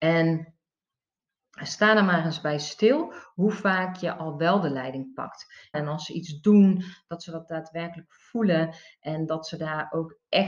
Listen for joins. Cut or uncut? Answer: cut